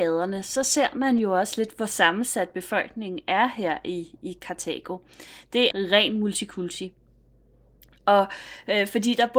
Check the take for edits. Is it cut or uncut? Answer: cut